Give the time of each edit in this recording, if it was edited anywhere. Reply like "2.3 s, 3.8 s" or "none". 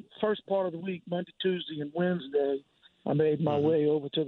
none

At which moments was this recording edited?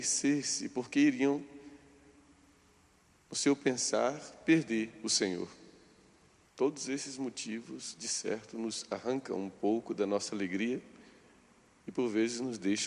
6.5 s

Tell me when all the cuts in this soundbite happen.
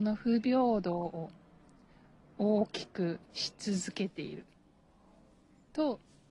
3.3 s

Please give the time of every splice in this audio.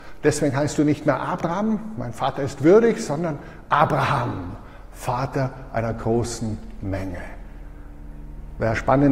none

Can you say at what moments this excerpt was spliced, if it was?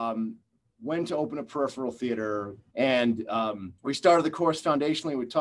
2.7 s, 3.8 s

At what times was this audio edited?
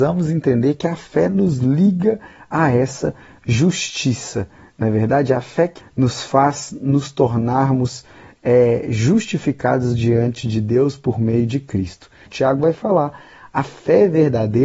5.8 s, 12.3 s

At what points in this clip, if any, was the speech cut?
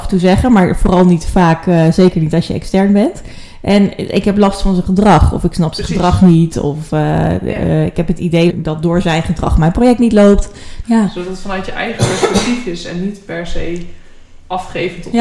8.5 s, 10.8 s

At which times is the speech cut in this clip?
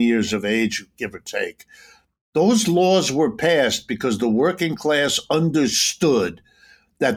none

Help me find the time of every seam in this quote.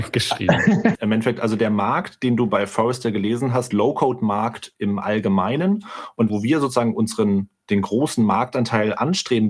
0.9 s, 3.7 s

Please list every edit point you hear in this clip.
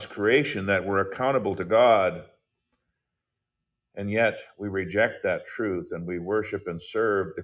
none

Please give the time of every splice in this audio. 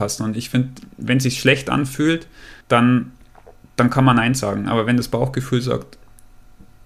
2.6 s

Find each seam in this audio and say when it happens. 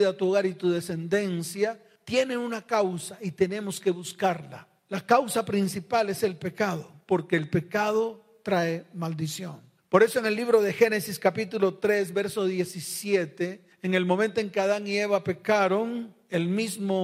none

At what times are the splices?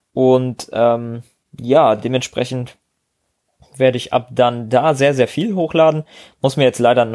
none

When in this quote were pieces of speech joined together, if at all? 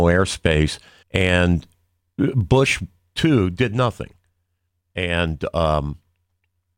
1.0 s

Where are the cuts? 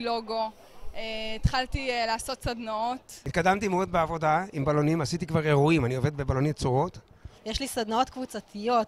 7.4 s

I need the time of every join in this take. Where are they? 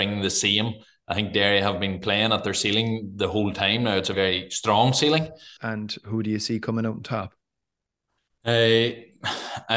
4.1 s, 5.6 s

